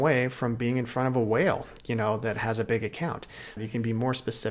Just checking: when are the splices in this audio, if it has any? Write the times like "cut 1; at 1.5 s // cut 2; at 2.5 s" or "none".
cut 1; at 3.6 s